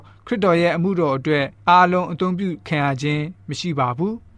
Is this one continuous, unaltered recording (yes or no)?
no